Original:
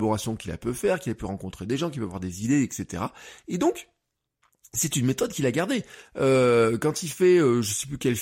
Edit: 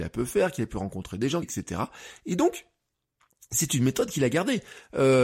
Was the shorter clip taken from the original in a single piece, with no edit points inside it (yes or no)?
no